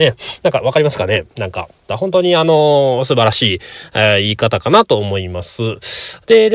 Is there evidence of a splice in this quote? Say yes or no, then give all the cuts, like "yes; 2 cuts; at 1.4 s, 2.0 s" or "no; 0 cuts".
yes; 1 cut; at 1.9 s